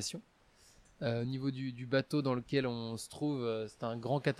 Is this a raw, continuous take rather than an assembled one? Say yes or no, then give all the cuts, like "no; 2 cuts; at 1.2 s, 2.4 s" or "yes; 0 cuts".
yes; 0 cuts